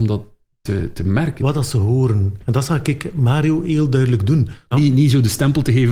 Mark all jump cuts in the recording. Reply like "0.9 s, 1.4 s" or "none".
1.4 s, 4.7 s